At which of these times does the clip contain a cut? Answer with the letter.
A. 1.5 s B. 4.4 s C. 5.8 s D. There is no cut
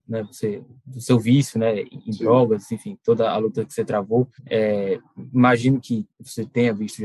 B